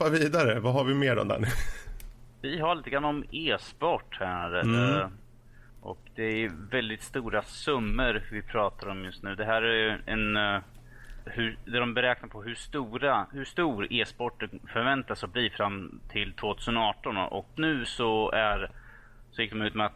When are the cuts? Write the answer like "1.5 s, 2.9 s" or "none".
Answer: 11.2 s, 17.6 s